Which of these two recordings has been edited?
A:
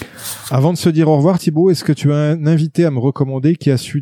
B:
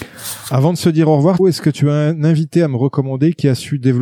B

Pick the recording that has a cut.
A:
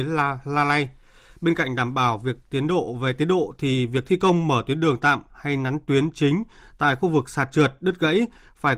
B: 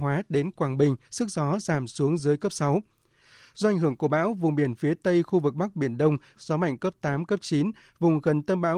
B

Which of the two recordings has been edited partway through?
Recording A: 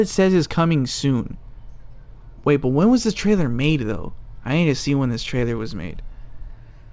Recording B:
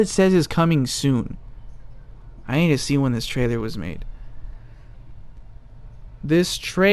B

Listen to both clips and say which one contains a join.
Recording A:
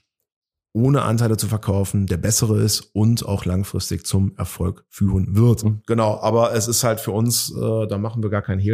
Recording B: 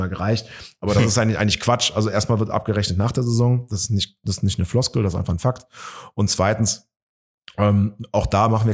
A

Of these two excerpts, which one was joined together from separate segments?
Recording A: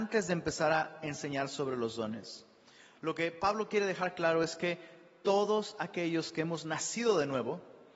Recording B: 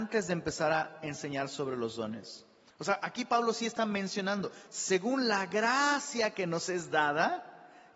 B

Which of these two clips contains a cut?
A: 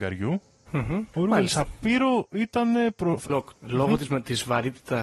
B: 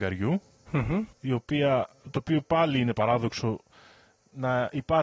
A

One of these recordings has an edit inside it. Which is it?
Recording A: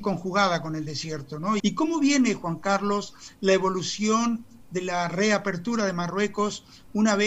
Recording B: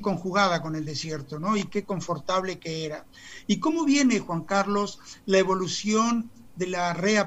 A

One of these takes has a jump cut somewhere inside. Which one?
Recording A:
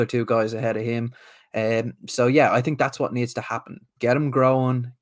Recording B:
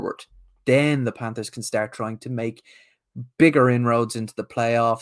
A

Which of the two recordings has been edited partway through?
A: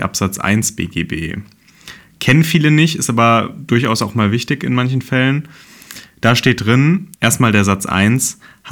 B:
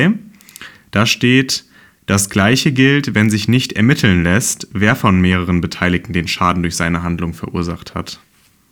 A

